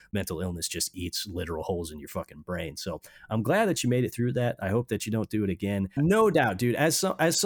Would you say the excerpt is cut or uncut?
cut